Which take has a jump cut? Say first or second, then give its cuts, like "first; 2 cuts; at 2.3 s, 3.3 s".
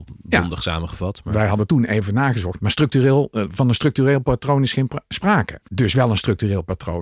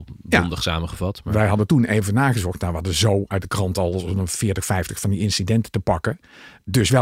first; 2 cuts; at 2.6 s, 5.7 s